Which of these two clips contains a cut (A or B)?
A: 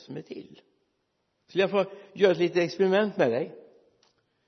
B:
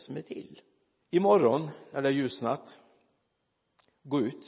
B